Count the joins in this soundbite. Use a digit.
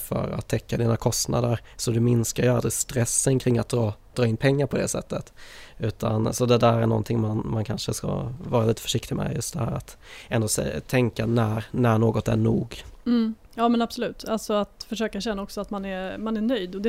1